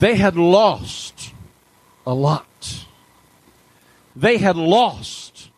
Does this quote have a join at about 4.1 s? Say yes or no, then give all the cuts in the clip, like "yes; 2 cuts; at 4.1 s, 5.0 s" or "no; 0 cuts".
yes; 1 cut; at 4.1 s